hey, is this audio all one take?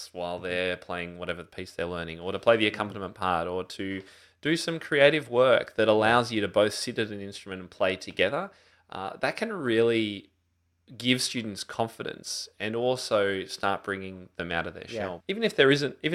no; 1 cut; at 15.2 s

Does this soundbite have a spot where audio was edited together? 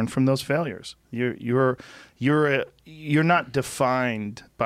no; 0 cuts

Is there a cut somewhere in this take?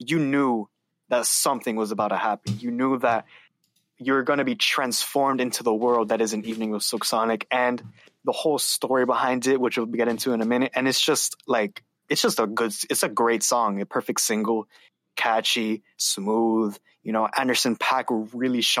no; 0 cuts

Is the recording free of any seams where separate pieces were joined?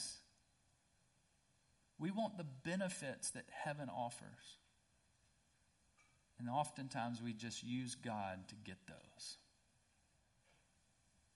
yes; 0 cuts

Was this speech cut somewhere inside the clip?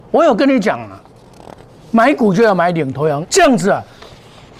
yes; 1 cut; at 3.2 s

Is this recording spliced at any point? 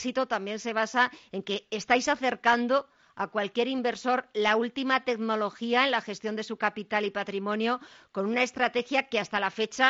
no; 0 cuts

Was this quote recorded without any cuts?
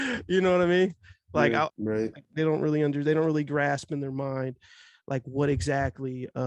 no; 1 cut; at 1.7 s

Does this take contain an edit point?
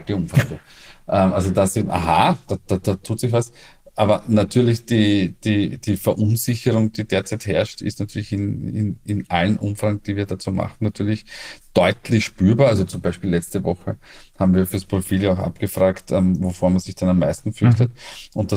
no; 0 cuts

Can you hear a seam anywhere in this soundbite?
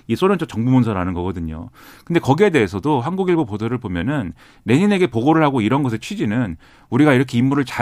no; 0 cuts

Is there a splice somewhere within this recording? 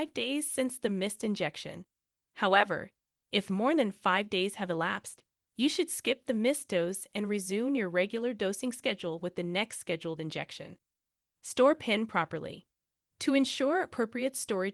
no; 0 cuts

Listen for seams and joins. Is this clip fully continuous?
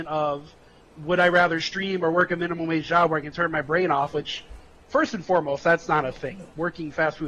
yes; 0 cuts

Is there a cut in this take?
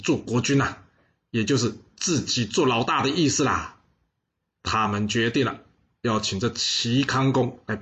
yes; 1 cut; at 4.4 s

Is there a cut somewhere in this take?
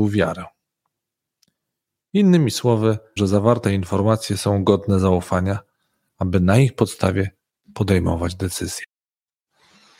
yes; 1 cut; at 3.2 s

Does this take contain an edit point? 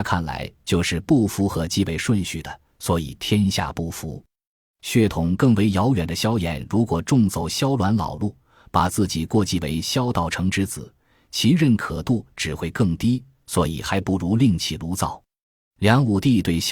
no; 0 cuts

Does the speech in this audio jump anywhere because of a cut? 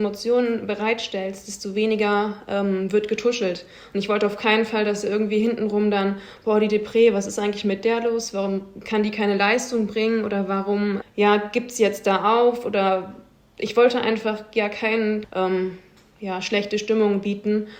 yes; 2 cuts; at 11.0 s, 15.2 s

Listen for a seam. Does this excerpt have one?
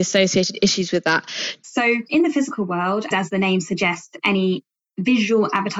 yes; 2 cuts; at 1.6 s, 3.1 s

